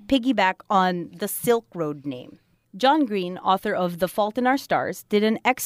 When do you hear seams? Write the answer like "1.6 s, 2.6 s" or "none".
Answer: none

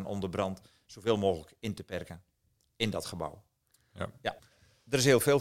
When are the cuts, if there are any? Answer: 4.4 s

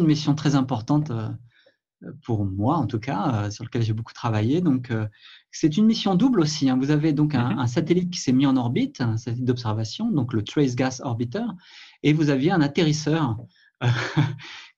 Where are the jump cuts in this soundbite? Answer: none

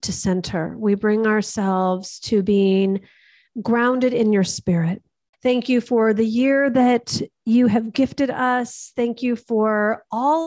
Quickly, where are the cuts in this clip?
5.3 s

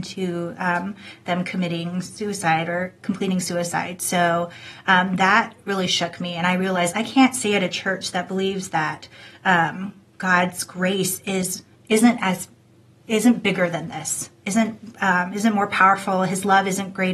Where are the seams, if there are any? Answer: none

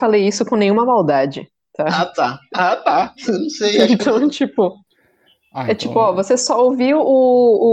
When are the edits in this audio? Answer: none

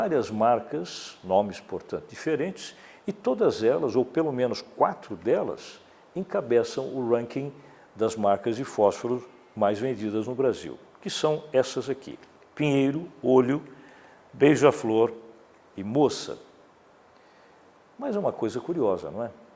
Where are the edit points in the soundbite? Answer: none

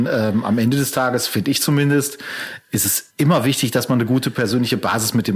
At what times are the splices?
3.1 s

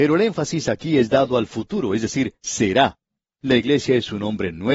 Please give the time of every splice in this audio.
3.4 s

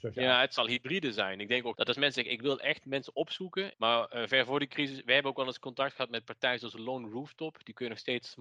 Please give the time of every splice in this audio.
1.7 s, 3.7 s

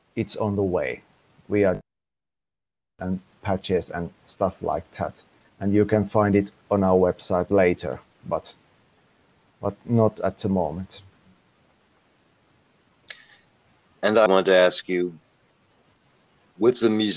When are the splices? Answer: 14.3 s

